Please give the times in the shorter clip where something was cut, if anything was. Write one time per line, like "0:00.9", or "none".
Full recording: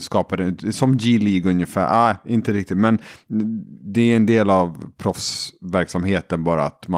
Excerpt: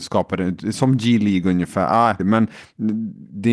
0:02.2

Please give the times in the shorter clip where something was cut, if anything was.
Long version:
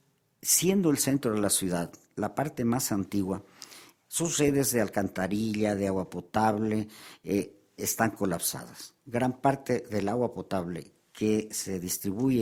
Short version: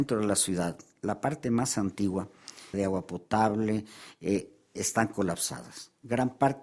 0:02.7

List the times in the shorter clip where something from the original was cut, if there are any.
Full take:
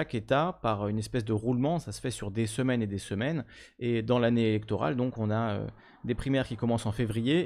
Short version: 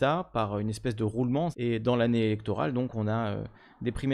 0:01.5

